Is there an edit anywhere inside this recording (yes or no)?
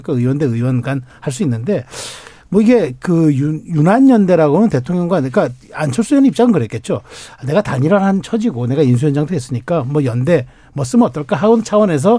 no